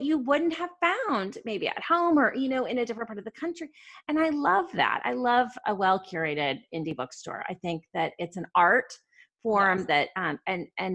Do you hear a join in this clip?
no; 0 cuts

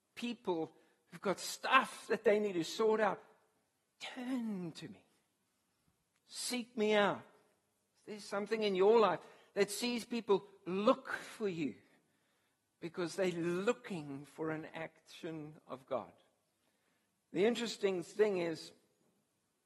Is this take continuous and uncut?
yes; 0 cuts

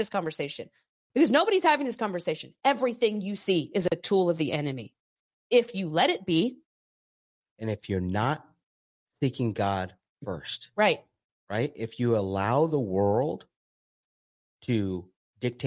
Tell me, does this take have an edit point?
no; 0 cuts

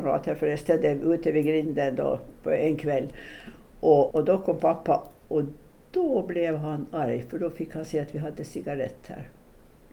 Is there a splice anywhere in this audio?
yes; 1 cut; at 4.1 s

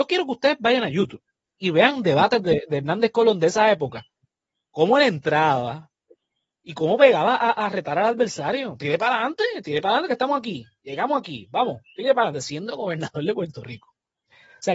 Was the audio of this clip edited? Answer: no; 0 cuts

